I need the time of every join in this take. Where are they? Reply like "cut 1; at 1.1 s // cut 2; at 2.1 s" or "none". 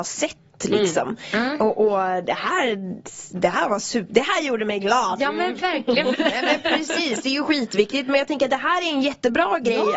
cut 1; at 6.1 s